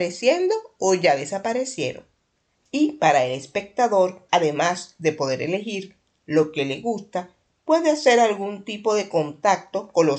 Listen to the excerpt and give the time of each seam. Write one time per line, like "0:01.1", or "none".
0:02.6
0:04.3